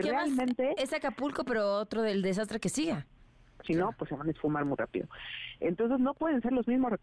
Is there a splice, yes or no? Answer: yes